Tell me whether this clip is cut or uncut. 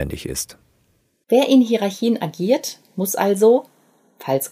uncut